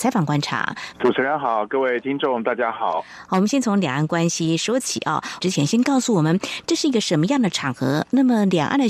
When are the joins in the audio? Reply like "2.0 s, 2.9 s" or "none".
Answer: 0.9 s, 5.4 s